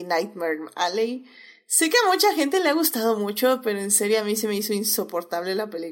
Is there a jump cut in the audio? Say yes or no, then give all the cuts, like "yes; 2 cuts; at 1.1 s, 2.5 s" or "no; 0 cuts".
no; 0 cuts